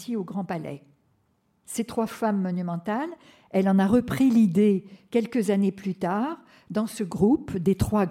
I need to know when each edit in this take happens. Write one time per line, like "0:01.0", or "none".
0:01.6